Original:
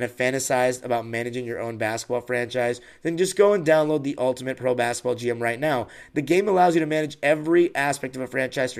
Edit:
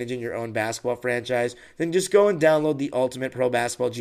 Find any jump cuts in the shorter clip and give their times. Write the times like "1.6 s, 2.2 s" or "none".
none